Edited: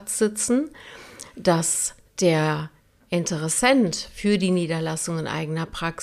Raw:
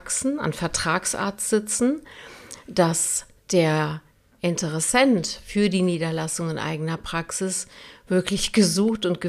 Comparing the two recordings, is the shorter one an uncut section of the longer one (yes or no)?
yes